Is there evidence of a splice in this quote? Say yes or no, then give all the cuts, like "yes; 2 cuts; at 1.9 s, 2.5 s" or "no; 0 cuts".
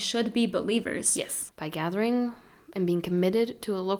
yes; 1 cut; at 1.5 s